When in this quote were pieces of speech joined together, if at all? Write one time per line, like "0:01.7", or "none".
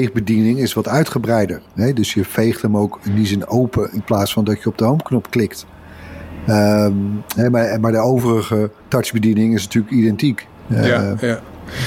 0:08.8